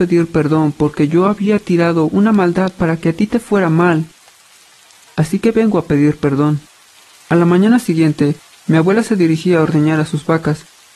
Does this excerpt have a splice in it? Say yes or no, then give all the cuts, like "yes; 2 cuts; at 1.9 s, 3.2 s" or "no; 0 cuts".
yes; 1 cut; at 7.1 s